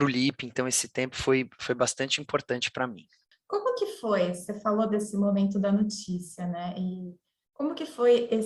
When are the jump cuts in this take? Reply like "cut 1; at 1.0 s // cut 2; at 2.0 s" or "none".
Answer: none